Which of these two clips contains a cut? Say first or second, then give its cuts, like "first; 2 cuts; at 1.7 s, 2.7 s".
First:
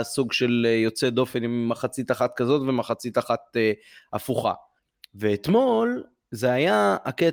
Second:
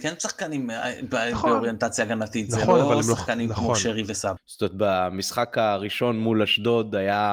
second; 1 cut; at 4.4 s